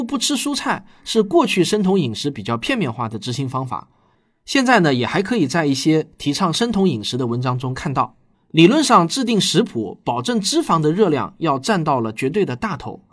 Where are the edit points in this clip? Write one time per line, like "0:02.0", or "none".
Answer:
0:08.3